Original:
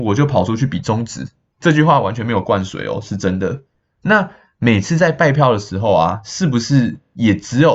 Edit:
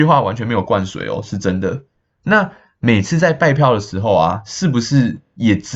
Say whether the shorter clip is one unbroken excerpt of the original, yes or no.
yes